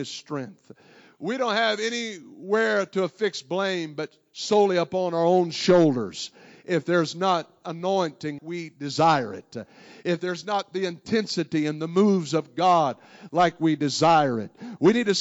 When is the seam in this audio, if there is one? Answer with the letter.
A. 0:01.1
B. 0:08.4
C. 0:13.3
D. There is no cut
B